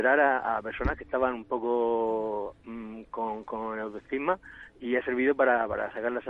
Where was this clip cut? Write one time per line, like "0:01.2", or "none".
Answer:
none